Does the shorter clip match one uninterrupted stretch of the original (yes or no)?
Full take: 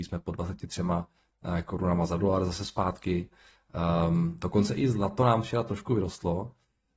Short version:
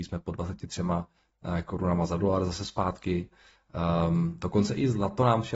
yes